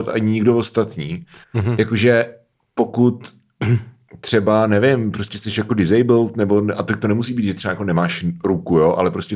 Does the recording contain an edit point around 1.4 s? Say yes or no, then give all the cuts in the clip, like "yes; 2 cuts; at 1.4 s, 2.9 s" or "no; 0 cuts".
yes; 1 cut; at 1.4 s